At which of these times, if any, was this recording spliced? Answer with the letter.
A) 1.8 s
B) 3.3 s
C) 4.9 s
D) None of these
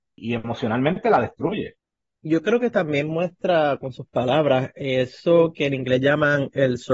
D